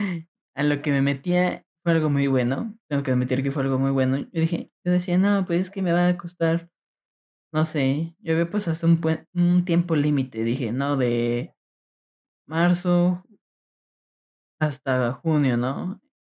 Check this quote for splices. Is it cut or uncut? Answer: uncut